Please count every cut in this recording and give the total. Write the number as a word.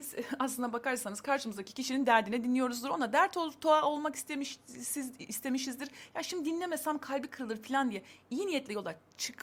zero